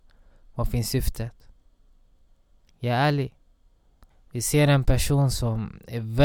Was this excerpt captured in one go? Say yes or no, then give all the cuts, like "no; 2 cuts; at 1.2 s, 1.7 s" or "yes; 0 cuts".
no; 1 cut; at 4.1 s